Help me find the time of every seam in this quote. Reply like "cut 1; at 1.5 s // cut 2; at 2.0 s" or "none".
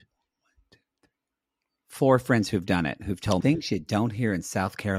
cut 1; at 3.4 s